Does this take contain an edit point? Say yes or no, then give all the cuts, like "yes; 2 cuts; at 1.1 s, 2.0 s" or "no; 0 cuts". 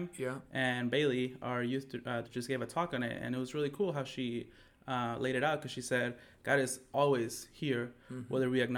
yes; 1 cut; at 2.2 s